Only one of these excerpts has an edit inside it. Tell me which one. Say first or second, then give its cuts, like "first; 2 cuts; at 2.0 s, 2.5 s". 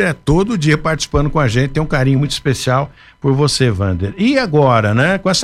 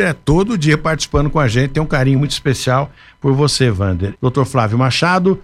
second; 1 cut; at 4.1 s